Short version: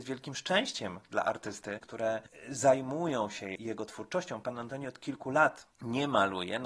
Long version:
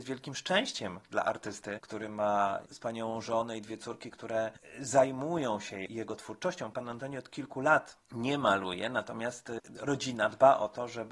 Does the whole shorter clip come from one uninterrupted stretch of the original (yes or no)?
no